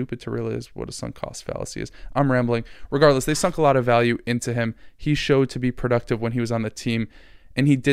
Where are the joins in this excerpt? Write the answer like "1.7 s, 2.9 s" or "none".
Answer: none